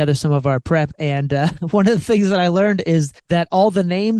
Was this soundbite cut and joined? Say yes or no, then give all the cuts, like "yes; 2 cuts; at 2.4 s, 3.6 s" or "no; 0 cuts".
yes; 1 cut; at 3.2 s